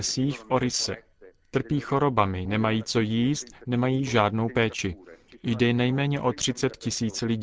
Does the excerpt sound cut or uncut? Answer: uncut